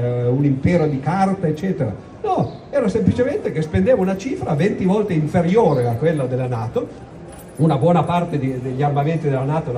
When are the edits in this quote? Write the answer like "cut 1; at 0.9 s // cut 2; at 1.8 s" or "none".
none